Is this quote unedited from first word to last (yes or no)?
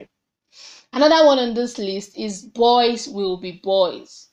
yes